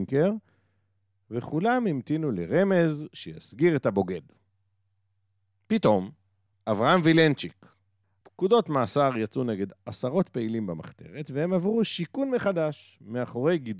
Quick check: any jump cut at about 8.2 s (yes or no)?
yes